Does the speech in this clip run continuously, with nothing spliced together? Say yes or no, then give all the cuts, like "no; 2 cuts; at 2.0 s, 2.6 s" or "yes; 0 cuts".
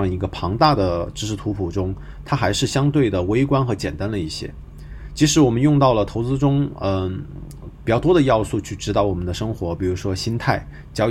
yes; 0 cuts